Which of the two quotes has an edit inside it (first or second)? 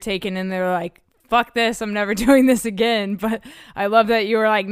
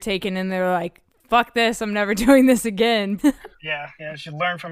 second